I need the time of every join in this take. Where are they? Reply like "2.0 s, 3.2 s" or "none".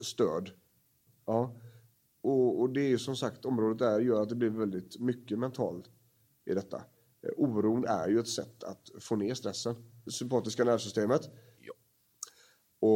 1.1 s, 10.1 s, 11.6 s